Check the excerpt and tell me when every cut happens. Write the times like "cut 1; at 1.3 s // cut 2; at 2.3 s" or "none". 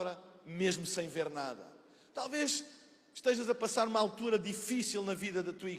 none